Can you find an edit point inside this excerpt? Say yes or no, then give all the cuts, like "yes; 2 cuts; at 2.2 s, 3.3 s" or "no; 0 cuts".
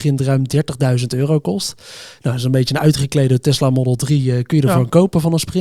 no; 0 cuts